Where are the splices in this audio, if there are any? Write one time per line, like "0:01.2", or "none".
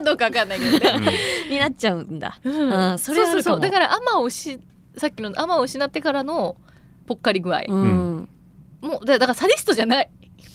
none